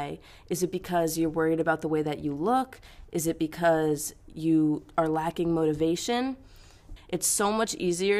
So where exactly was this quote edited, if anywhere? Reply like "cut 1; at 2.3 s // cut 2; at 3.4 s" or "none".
cut 1; at 7.0 s